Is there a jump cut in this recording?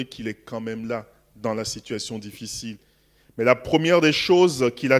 no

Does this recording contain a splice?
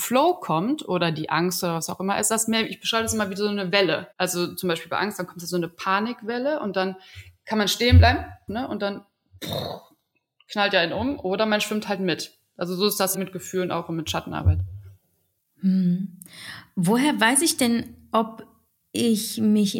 yes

